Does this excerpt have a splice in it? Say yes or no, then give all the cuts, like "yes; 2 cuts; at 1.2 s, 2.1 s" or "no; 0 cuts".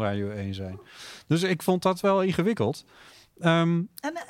no; 0 cuts